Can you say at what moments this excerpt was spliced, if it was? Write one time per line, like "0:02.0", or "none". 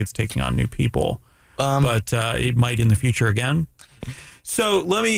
0:04.0